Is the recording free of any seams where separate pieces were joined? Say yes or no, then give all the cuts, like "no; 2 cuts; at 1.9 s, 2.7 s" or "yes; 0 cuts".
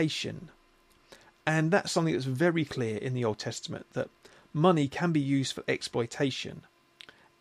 yes; 0 cuts